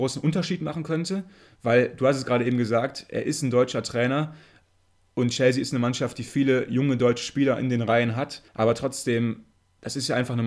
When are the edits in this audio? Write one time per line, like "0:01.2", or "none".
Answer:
0:08.5